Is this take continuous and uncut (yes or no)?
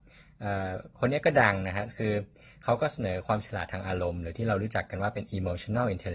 yes